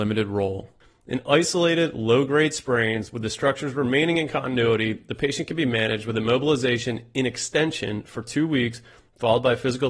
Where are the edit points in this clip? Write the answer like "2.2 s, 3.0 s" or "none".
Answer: none